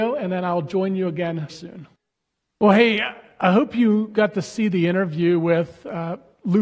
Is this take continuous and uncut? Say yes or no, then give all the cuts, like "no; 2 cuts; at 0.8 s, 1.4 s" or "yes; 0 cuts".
no; 1 cut; at 1.5 s